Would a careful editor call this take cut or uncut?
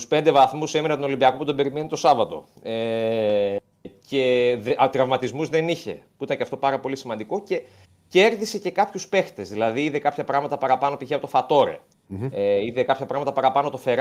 uncut